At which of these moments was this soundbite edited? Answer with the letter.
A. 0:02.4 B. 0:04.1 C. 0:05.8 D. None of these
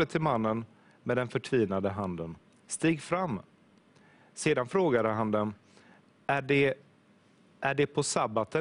D